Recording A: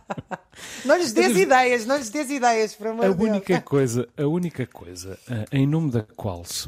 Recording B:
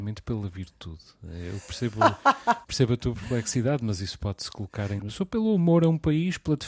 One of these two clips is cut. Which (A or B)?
B